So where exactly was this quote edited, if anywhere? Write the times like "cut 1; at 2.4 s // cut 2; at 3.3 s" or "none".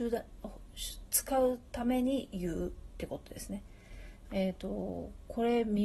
cut 1; at 4.2 s